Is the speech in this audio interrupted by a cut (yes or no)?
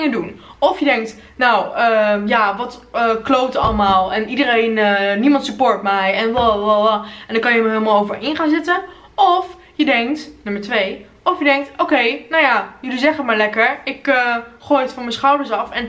no